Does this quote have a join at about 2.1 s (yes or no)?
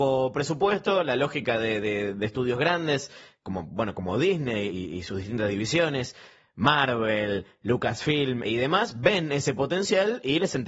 no